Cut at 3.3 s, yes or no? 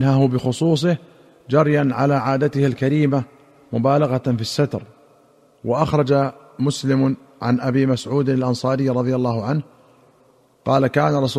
no